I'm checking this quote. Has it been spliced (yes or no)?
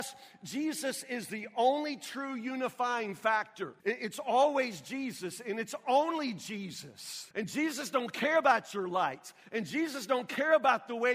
yes